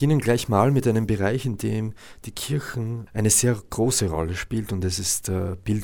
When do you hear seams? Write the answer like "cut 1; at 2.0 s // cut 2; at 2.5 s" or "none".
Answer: cut 1; at 3.1 s